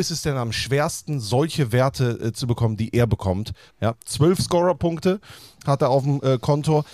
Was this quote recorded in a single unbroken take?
no; 1 cut; at 3.7 s

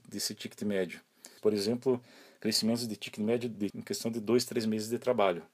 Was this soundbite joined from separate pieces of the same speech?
yes; 2 cuts; at 1.4 s, 3.7 s

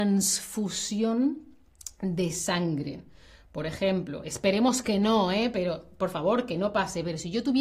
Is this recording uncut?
yes; 0 cuts

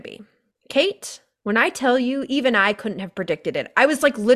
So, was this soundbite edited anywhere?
no; 0 cuts

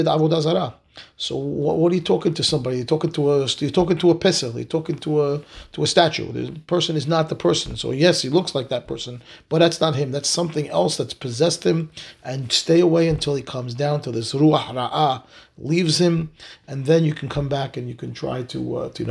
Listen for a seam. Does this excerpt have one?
no; 0 cuts

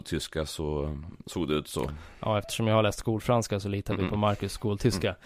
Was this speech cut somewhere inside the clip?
no; 0 cuts

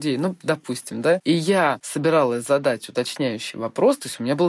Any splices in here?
no; 0 cuts

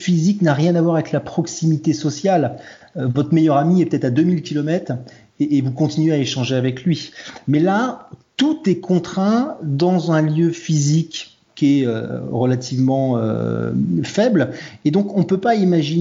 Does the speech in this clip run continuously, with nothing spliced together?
yes; 0 cuts

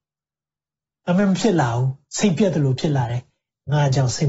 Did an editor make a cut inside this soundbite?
no; 0 cuts

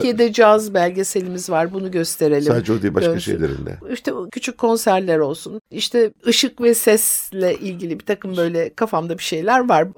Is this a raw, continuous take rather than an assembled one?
no; 2 cuts; at 4.3 s, 5.7 s

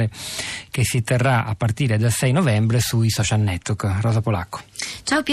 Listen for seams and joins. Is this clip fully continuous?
yes; 0 cuts

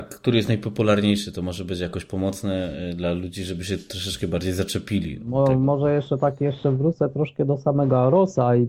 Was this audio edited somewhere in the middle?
no; 0 cuts

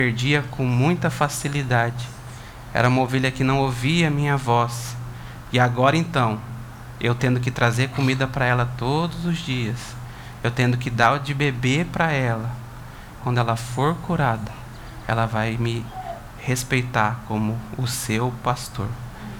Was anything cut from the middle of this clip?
yes; 1 cut; at 13.2 s

